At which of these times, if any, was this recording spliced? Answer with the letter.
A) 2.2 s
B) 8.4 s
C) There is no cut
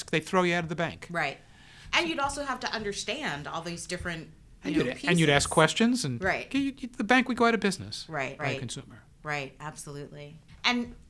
B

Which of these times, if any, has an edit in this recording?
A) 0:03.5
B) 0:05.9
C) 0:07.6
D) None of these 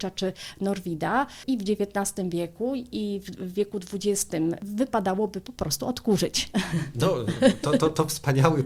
C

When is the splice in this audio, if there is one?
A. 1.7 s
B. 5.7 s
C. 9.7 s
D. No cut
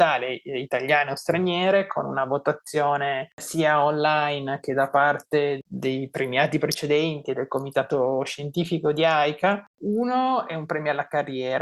C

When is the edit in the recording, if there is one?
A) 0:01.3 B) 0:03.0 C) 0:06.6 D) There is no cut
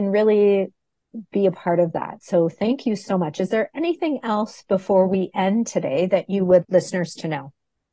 C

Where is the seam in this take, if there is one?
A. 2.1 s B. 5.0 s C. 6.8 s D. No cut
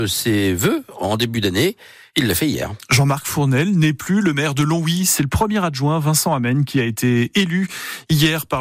D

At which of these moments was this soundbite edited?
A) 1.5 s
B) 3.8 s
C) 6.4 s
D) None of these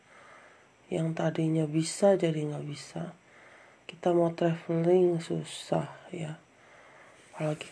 D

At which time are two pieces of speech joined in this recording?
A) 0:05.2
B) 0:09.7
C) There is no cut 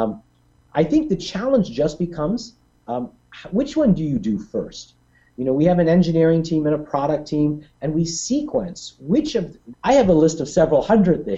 B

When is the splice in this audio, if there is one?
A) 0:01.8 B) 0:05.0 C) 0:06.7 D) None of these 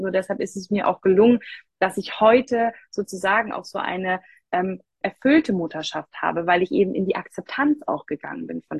B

